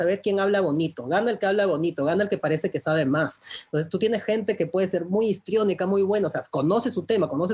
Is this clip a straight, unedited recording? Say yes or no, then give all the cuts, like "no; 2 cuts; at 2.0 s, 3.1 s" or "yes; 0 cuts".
yes; 0 cuts